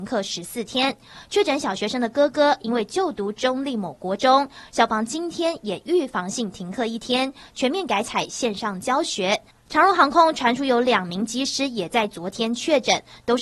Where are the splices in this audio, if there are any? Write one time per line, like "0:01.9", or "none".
0:09.5